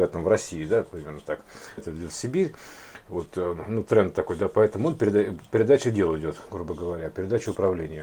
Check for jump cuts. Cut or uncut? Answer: cut